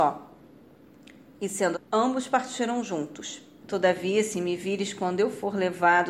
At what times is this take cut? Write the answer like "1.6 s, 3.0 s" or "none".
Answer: 1.7 s, 3.6 s